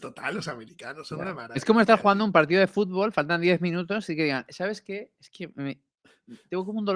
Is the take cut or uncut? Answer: uncut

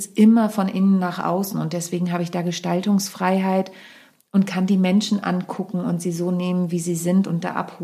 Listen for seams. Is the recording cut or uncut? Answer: uncut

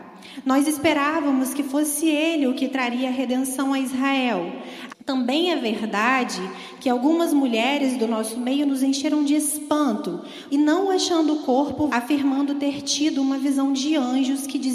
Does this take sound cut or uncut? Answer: cut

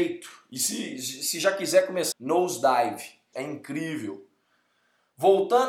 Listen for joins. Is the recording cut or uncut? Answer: cut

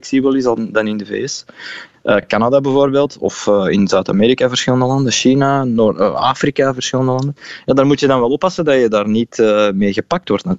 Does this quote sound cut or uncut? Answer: uncut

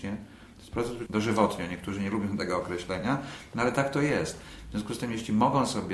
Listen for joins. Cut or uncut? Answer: cut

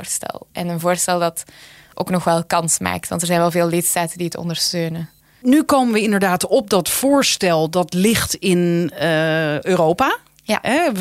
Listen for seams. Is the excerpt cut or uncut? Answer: uncut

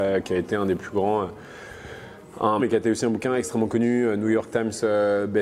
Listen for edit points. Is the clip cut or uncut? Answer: cut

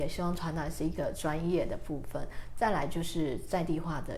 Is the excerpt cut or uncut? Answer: uncut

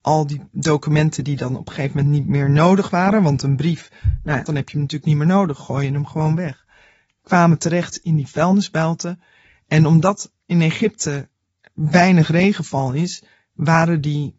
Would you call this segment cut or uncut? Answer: cut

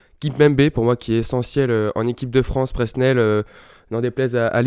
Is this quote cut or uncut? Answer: uncut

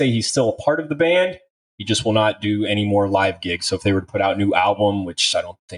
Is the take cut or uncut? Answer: uncut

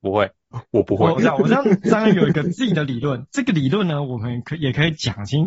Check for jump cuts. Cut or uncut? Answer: cut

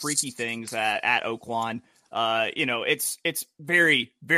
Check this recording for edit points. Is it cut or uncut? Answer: uncut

